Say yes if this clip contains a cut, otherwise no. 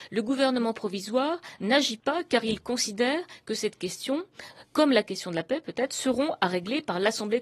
no